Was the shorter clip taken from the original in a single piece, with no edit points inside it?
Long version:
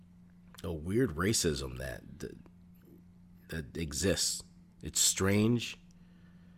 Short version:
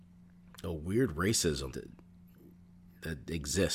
no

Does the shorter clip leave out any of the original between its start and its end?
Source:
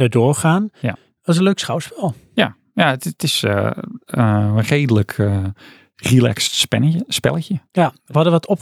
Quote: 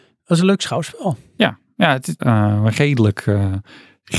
yes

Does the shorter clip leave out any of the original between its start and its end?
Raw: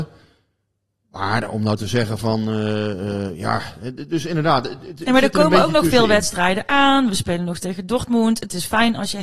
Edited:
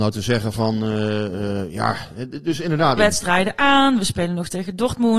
yes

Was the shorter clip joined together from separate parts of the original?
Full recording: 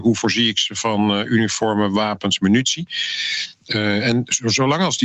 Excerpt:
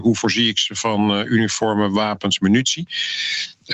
no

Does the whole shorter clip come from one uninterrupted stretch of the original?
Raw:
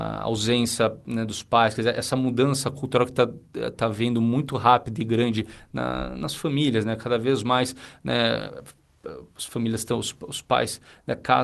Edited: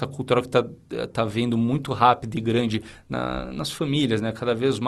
yes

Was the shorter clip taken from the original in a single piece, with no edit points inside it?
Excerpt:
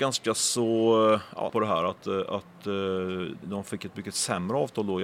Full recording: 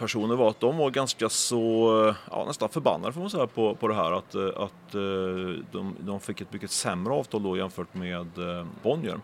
no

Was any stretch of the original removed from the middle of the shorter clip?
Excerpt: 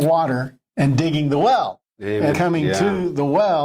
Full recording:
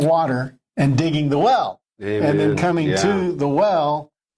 yes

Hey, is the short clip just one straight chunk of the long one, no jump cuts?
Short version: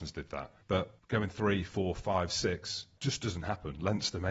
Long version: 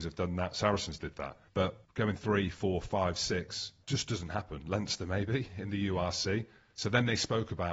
yes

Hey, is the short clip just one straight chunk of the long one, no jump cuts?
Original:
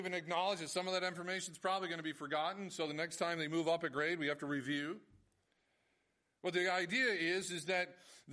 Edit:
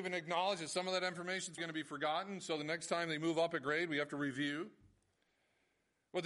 no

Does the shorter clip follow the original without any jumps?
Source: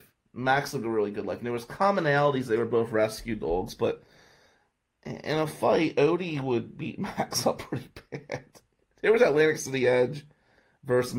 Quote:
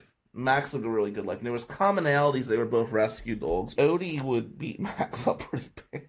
no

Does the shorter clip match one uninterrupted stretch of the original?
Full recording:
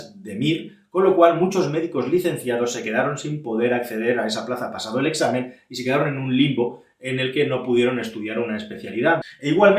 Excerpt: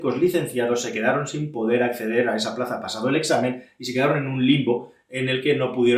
yes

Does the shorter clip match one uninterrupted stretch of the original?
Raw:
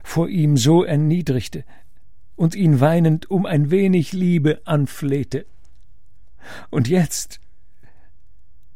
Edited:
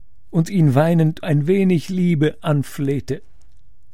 no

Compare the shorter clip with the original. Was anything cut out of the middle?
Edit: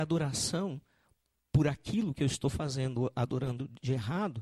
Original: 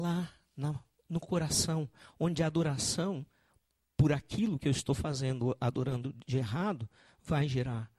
no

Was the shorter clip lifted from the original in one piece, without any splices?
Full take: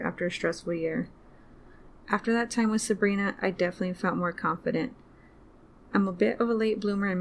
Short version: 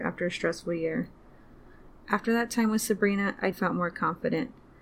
no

